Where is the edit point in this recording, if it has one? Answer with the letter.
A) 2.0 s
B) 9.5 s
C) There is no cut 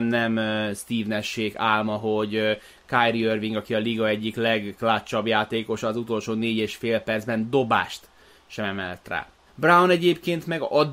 B